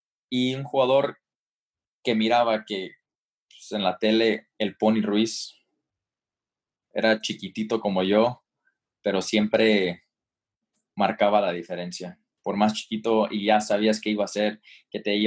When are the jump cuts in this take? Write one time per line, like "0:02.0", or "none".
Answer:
none

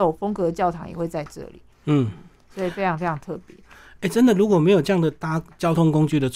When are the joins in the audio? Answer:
none

